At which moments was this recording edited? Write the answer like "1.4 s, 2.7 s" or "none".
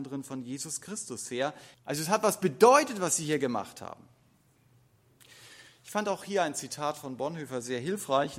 1.7 s